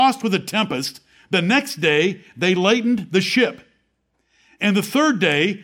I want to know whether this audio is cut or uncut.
uncut